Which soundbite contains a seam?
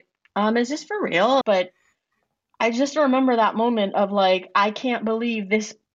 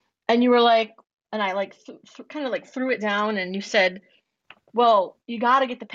first; 1 cut; at 1.4 s

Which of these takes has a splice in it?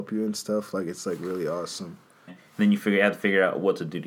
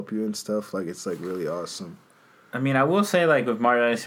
first; 1 cut; at 2.3 s

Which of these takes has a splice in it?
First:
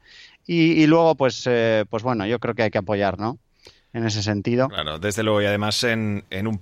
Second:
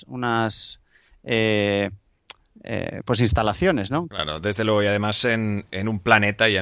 second; 1 cut; at 4.1 s

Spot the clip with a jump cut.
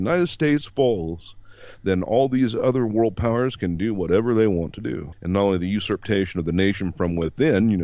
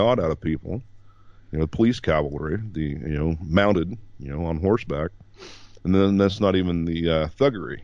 first; 1 cut; at 5.1 s

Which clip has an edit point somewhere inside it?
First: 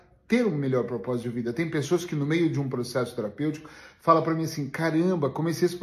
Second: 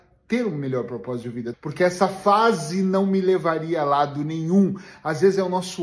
second; 1 cut; at 1.5 s

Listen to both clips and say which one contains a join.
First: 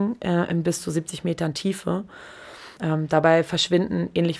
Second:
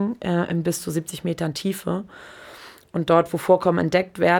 first; 1 cut; at 2.8 s

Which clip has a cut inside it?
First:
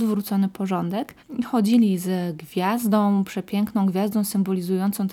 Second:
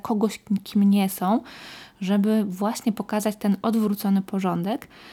first; 1 cut; at 1.2 s

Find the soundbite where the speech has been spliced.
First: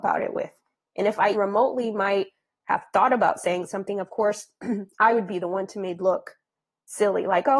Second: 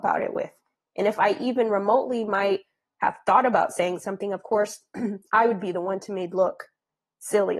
first; 1 cut; at 1.3 s

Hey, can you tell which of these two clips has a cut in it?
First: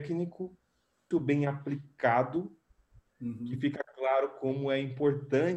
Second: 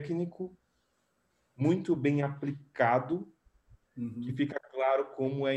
first; 1 cut; at 1.1 s

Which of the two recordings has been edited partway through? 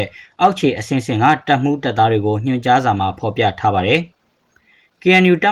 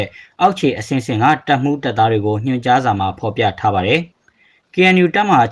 second; 1 cut; at 4.1 s

